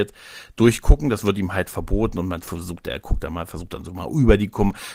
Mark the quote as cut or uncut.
uncut